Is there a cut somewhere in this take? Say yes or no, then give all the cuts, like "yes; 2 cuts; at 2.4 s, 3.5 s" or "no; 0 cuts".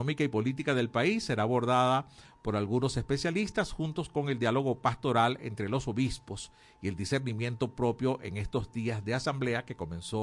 no; 0 cuts